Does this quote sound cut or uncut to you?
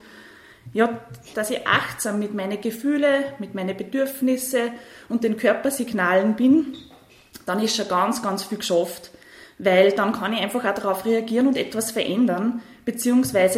cut